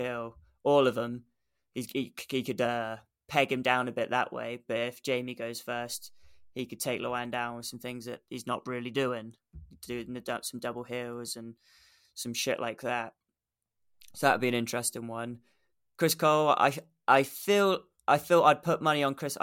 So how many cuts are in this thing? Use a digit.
0